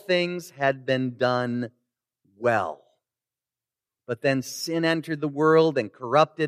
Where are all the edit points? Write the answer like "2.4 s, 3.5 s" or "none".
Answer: none

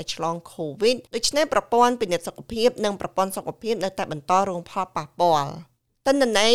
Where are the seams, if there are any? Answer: 1.1 s

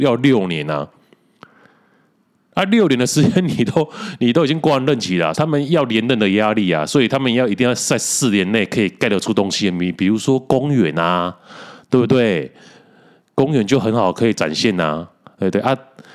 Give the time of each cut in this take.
5.3 s

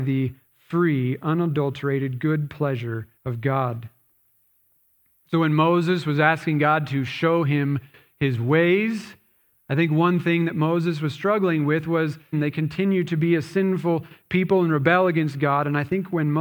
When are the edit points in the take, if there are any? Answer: 3.2 s, 12.3 s

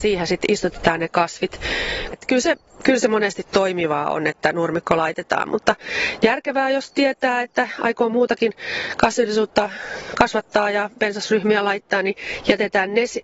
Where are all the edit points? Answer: 2.1 s

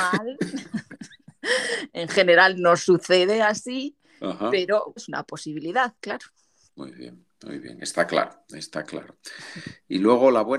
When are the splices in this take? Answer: 5.0 s

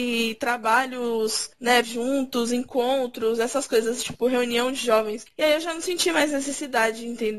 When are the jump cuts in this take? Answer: 1.8 s, 5.3 s

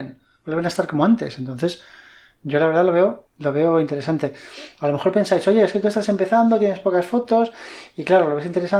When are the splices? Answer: none

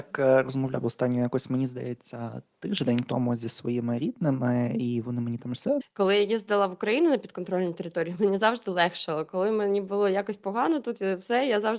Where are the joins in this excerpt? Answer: 5.8 s

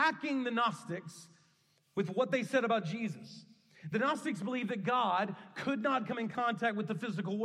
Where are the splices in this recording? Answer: none

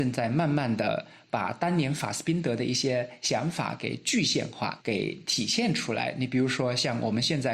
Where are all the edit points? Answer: 4.8 s

